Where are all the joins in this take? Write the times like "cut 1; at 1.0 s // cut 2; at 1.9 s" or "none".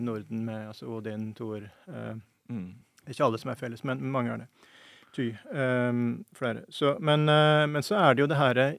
none